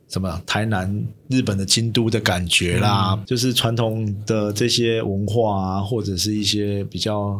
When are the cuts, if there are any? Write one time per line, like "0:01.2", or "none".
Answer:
0:03.3

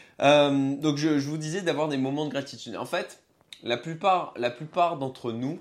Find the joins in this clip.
none

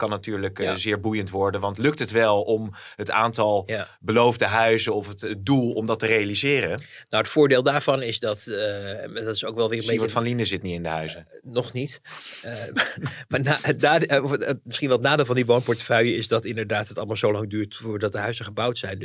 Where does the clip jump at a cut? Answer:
none

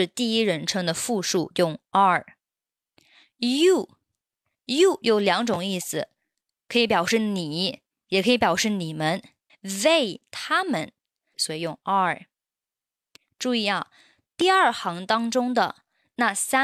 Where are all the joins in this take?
0:09.5
0:11.3

